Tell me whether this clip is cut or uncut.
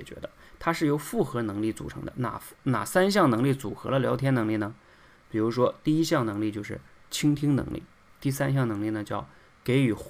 cut